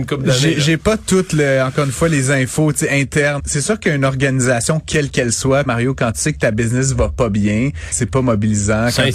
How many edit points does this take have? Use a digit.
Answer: 3